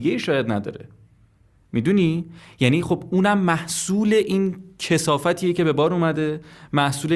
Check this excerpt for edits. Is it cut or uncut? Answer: uncut